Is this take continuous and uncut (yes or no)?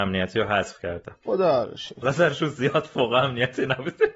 no